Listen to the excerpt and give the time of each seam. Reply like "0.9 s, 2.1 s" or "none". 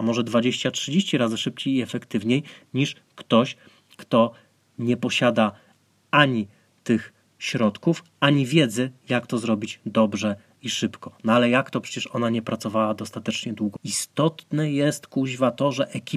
13.8 s